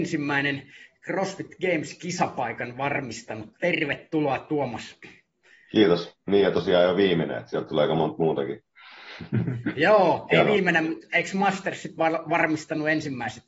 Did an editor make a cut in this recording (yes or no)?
no